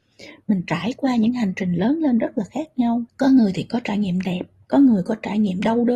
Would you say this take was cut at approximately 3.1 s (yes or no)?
yes